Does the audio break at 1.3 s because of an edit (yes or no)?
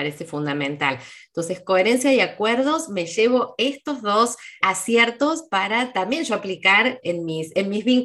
no